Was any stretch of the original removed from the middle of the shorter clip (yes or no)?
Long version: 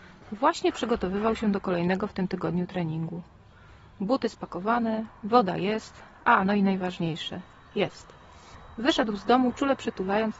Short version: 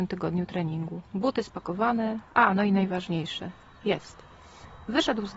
yes